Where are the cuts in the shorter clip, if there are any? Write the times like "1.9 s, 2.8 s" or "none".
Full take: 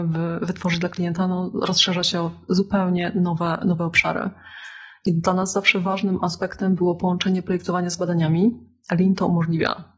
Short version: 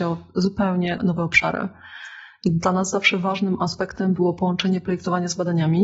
1.0 s

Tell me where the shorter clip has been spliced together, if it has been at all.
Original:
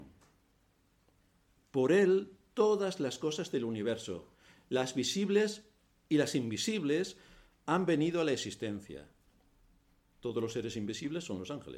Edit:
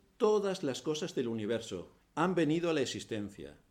2.0 s

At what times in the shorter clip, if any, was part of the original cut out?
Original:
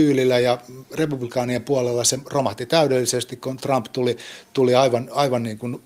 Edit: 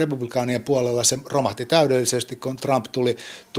none

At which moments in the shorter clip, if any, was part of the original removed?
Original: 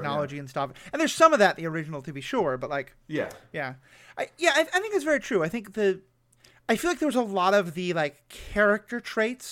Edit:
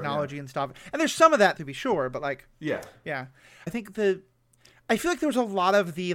1.6 s, 3.7 s

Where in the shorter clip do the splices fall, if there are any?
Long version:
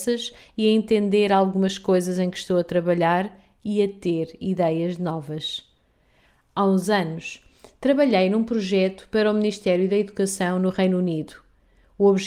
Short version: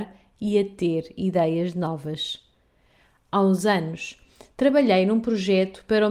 none

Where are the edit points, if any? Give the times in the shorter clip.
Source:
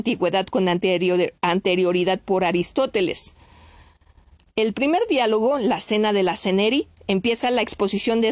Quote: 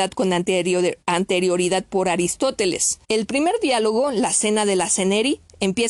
3.0 s

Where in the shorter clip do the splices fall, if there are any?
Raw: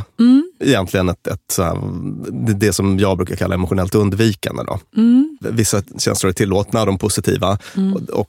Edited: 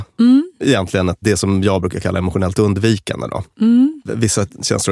1.2 s

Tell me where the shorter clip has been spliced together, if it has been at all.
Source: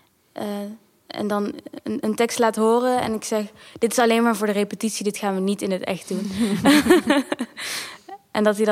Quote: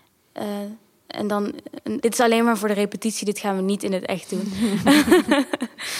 2.0 s

